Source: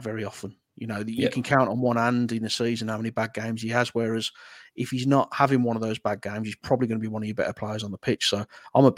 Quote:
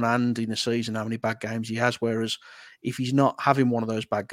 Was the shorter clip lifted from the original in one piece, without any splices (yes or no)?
yes